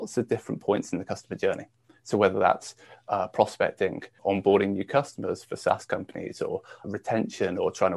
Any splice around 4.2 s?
yes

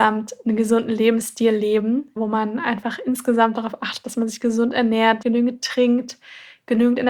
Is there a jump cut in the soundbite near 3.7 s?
no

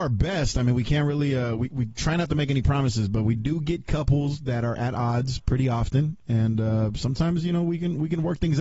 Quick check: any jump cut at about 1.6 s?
no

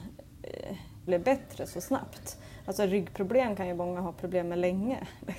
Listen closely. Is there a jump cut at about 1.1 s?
yes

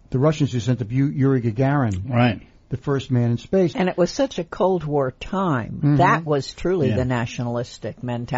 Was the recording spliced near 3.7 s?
yes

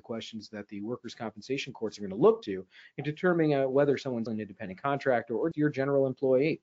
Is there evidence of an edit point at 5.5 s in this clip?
yes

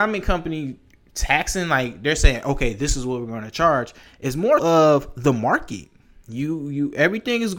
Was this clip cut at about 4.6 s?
yes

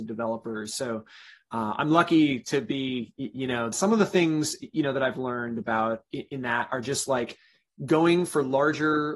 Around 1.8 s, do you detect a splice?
no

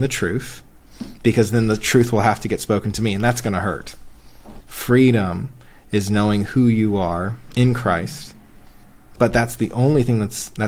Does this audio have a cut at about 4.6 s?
yes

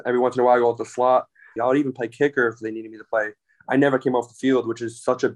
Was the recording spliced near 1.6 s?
yes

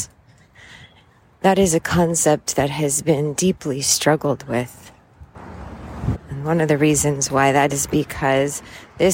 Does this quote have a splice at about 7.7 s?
yes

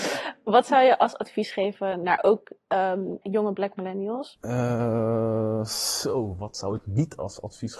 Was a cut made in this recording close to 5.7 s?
no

